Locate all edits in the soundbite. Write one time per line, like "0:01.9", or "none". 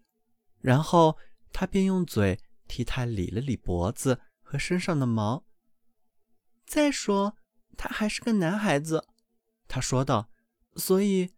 none